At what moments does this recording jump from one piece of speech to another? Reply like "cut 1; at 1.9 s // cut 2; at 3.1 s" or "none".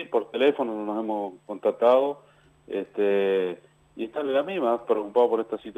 cut 1; at 4.8 s